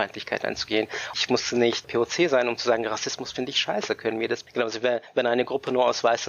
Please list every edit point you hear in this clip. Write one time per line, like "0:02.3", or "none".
none

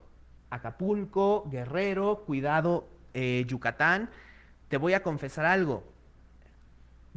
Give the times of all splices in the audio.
none

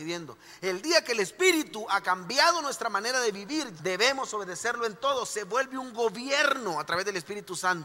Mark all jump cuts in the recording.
0:03.8

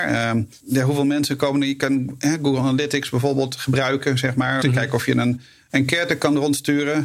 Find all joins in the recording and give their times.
0:04.6

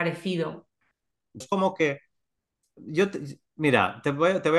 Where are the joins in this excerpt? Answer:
0:01.4

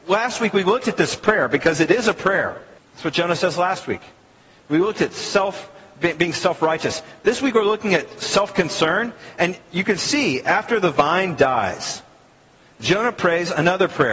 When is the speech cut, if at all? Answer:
0:02.8

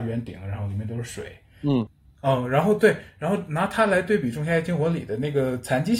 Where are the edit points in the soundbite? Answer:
none

